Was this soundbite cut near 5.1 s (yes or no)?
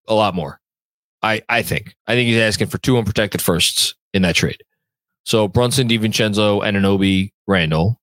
yes